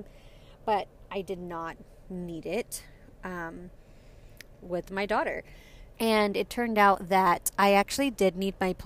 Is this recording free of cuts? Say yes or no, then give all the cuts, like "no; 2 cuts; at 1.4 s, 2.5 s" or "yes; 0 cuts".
no; 1 cut; at 5.9 s